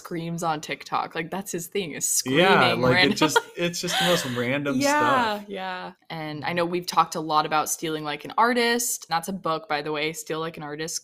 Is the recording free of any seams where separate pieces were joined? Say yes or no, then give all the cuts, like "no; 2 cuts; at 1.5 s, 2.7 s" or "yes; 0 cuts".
no; 2 cuts; at 5.9 s, 9.1 s